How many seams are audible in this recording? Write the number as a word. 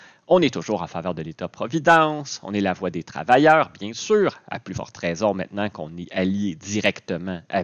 zero